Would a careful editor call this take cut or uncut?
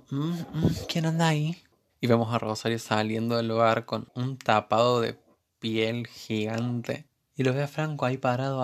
cut